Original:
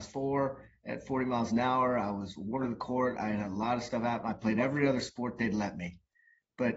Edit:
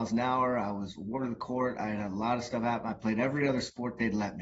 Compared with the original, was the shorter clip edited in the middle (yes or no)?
no